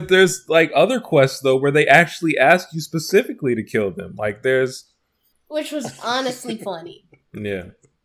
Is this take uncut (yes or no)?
no